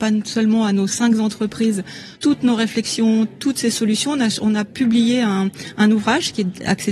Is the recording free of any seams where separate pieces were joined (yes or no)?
no